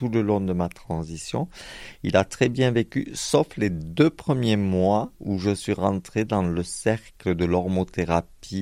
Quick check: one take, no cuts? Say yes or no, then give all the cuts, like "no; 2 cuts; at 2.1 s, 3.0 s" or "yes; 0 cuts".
no; 1 cut; at 5.1 s